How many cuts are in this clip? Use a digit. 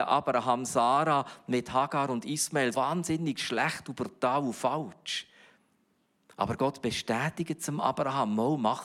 1